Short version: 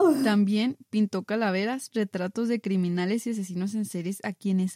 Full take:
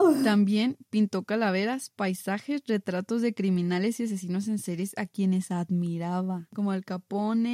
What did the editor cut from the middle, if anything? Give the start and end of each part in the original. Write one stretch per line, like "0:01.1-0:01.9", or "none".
0:01.9-0:02.6